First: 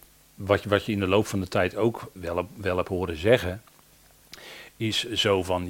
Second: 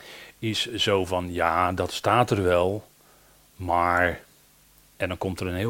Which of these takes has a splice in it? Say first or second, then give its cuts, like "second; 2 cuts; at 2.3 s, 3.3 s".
first; 1 cut; at 2.2 s